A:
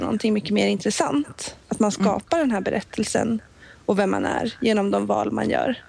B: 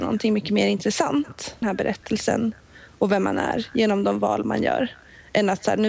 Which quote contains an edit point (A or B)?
B